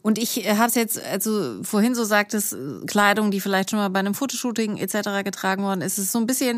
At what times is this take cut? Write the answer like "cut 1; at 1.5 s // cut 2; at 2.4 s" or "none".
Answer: none